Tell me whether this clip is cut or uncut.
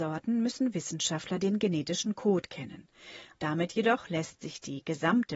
cut